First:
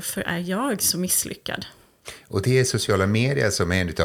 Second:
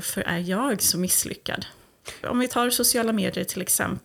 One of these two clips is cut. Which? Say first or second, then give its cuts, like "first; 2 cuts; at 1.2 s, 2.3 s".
second; 1 cut; at 2.2 s